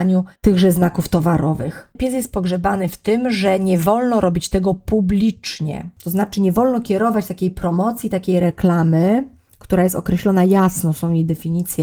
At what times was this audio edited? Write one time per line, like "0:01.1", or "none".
0:02.0
0:06.0